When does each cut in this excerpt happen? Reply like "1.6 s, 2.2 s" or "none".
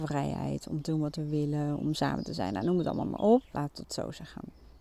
3.5 s